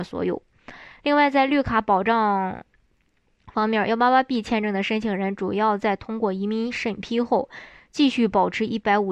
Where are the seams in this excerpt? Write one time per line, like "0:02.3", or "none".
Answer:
none

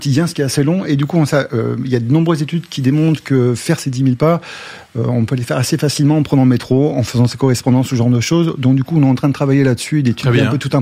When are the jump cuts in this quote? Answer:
none

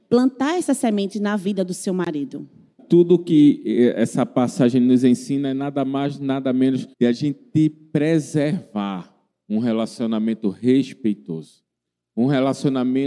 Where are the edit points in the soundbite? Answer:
0:02.8
0:06.9

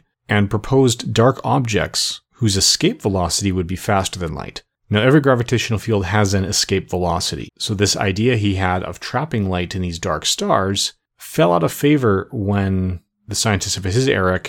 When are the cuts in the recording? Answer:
0:07.5

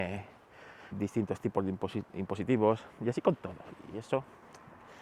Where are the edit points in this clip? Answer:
0:00.9

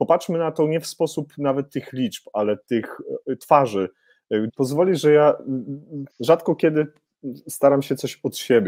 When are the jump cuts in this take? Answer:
0:04.5
0:06.1

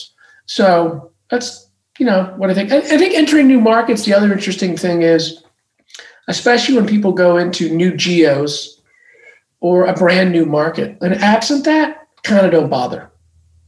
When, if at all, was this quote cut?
0:11.0
0:12.2

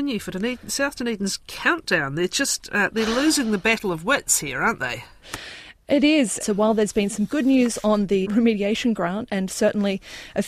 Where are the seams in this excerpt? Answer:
0:06.4
0:08.2

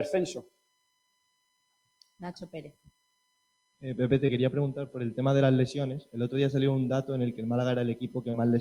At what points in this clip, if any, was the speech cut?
none

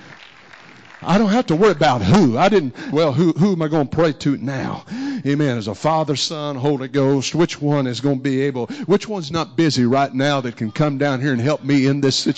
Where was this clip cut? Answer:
0:02.9

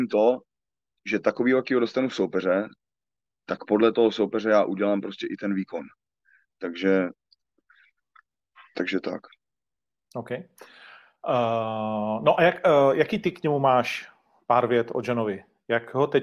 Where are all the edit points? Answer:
none

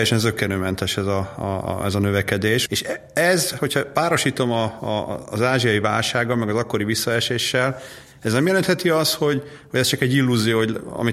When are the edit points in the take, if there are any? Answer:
0:02.7

